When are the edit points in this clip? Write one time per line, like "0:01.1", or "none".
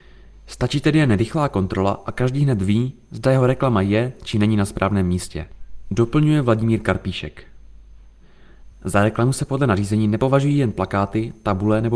none